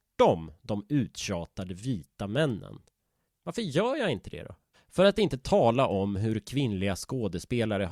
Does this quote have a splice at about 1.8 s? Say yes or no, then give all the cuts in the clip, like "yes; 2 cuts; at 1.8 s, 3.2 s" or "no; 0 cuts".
no; 2 cuts; at 3.3 s, 4.7 s